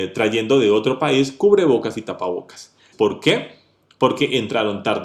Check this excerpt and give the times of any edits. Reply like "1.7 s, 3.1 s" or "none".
2.9 s